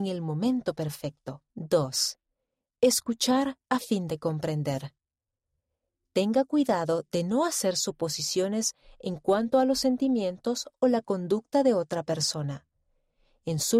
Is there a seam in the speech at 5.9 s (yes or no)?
no